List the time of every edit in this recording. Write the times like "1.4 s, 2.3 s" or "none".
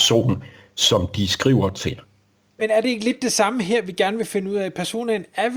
2.6 s